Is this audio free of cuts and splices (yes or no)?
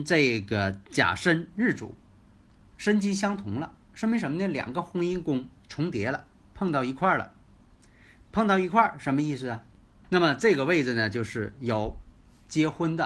yes